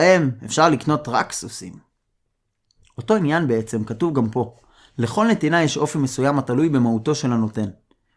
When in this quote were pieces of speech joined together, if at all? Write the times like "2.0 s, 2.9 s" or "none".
none